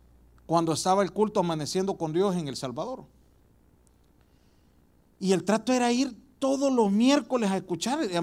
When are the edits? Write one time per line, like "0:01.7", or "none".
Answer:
none